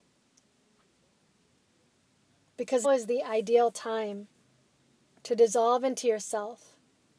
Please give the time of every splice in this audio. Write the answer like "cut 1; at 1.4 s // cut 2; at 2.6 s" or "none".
cut 1; at 2.8 s